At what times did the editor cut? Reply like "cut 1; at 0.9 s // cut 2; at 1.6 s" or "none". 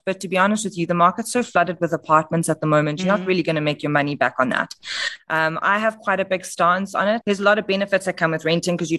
cut 1; at 7.2 s